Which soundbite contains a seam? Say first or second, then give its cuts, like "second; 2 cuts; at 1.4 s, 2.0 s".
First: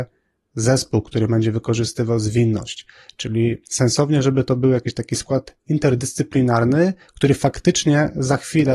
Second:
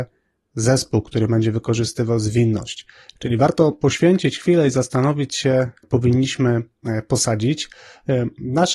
second; 2 cuts; at 3.2 s, 5.8 s